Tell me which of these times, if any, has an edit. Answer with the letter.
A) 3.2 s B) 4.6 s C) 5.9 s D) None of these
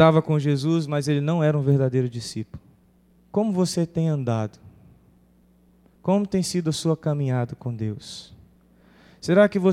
A